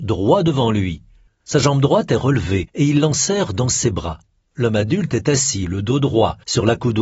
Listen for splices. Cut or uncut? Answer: cut